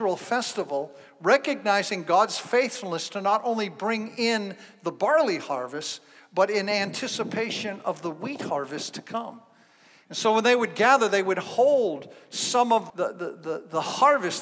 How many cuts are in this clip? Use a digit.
1